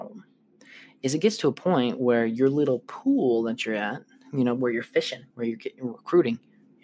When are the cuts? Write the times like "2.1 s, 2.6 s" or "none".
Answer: 5.3 s